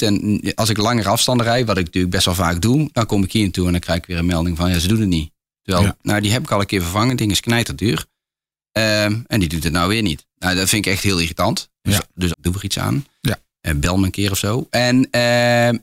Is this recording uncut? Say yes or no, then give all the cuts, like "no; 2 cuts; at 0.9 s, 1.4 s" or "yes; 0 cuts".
no; 2 cuts; at 6.0 s, 12.3 s